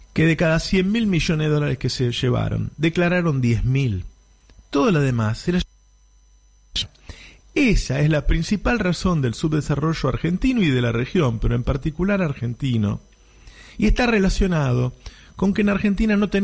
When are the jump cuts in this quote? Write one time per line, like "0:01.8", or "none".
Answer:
none